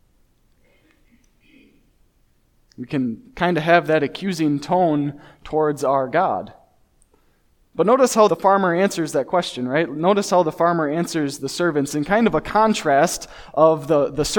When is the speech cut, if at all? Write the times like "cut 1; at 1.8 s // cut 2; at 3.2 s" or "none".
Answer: cut 1; at 8.3 s